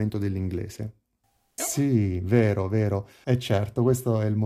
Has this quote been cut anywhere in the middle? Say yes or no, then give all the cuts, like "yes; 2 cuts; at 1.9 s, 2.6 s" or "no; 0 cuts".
yes; 2 cuts; at 1.6 s, 3.2 s